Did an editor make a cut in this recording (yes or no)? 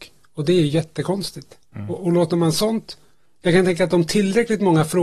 yes